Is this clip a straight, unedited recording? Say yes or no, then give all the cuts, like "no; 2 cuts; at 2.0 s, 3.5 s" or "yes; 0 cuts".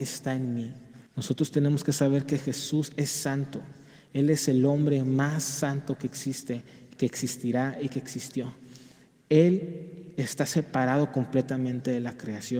no; 1 cut; at 1.1 s